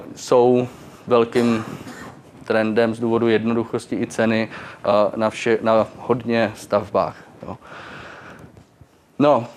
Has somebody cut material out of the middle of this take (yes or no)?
no